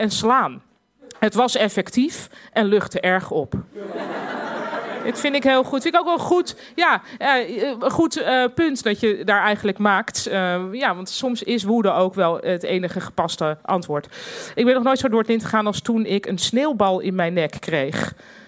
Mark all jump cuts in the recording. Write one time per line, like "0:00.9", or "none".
none